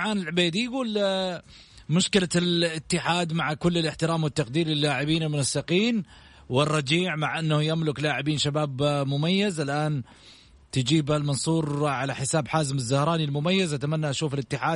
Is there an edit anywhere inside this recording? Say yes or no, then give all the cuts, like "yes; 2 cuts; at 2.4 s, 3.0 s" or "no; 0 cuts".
no; 0 cuts